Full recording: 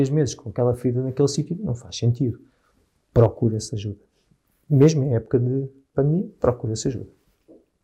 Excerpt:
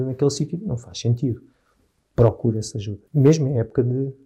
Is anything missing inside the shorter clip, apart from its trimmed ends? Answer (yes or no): yes